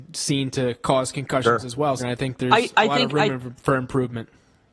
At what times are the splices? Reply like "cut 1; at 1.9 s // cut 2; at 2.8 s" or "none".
cut 1; at 2.0 s